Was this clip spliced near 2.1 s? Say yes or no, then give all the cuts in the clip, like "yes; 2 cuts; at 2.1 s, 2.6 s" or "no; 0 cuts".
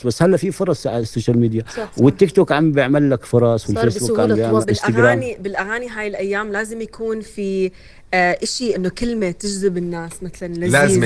no; 2 cuts; at 4.6 s, 8.7 s